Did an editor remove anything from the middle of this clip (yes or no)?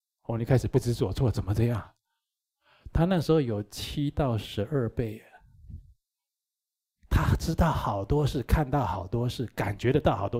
no